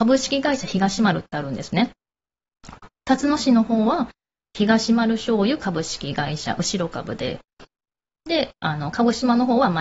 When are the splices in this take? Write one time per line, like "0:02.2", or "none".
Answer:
none

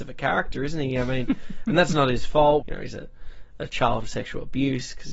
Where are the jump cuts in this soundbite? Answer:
0:02.6

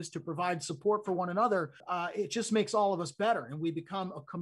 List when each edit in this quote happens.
0:01.8

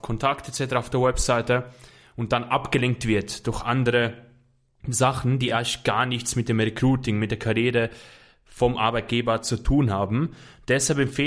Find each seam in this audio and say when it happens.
none

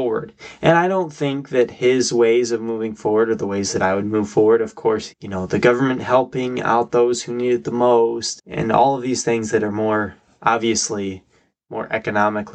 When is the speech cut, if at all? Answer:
0:05.1
0:08.4

